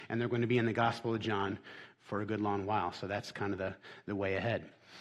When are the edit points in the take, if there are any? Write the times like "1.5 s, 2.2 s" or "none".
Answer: none